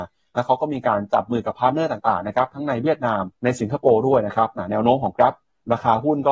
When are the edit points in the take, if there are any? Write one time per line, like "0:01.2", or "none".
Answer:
0:03.3